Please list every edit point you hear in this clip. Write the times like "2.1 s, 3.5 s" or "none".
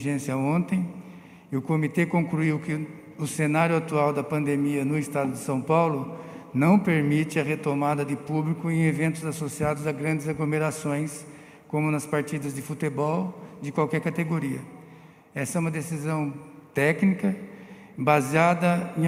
none